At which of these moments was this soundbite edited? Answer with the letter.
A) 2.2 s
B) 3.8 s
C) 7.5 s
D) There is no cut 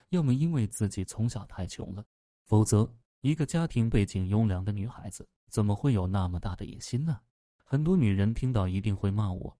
C